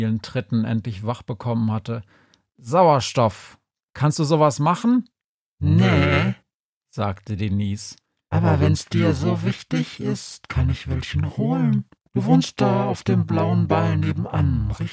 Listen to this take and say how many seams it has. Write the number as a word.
zero